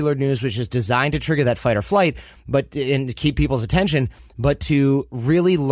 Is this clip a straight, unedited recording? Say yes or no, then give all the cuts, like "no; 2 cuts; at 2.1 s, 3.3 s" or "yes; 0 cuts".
yes; 0 cuts